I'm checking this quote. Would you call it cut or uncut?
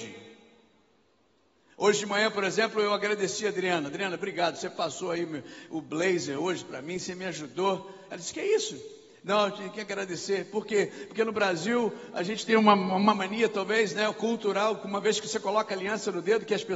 uncut